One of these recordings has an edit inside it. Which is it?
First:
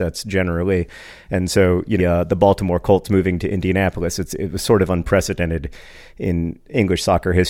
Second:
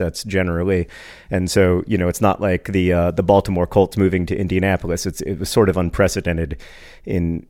first; 1 cut; at 2.0 s

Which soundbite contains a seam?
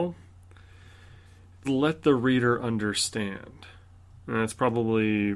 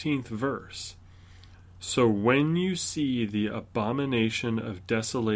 first; 1 cut; at 1.6 s

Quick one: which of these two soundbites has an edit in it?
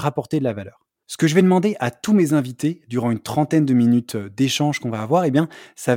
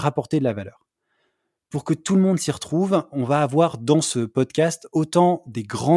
first; 1 cut; at 1.0 s

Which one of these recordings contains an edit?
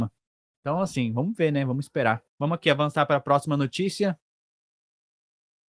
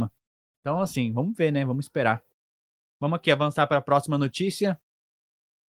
first; 1 cut; at 2.3 s

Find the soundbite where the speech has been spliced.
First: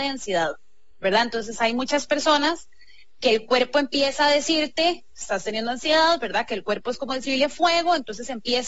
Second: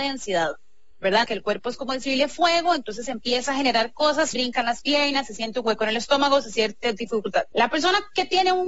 second; 3 cuts; at 1.2 s, 4.3 s, 7.5 s

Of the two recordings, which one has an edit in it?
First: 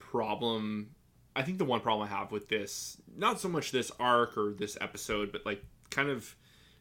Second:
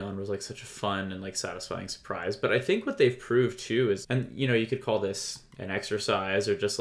second; 1 cut; at 4.0 s

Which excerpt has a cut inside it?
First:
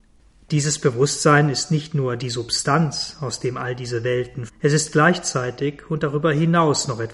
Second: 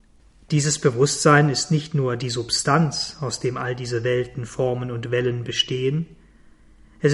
first; 1 cut; at 4.5 s

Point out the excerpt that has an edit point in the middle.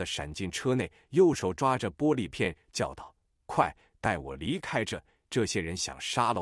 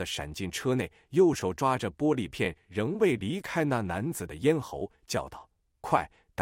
first; 1 cut; at 2.6 s

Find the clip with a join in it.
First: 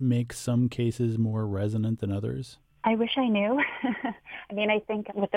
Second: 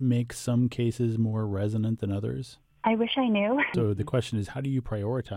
second; 1 cut; at 3.7 s

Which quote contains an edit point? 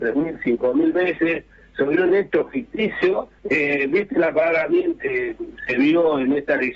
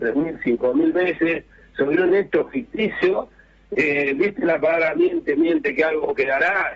first; 2 cuts; at 3.4 s, 5.0 s

